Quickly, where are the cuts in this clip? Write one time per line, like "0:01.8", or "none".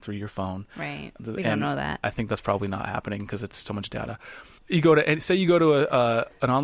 0:02.0
0:04.6